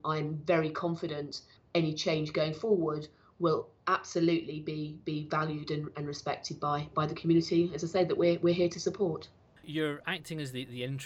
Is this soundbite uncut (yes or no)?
yes